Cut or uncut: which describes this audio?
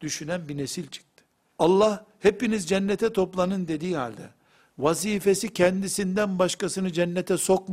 cut